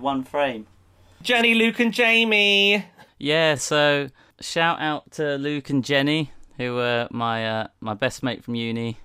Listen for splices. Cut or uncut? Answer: uncut